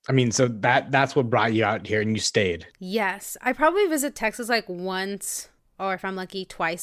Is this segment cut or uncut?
cut